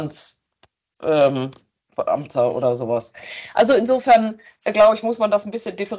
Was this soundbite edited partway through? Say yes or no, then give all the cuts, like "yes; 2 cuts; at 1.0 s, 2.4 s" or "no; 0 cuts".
no; 0 cuts